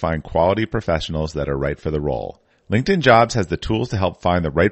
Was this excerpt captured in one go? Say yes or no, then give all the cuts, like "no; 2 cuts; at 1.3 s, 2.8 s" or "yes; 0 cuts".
no; 1 cut; at 2.5 s